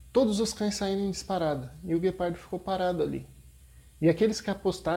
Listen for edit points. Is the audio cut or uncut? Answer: uncut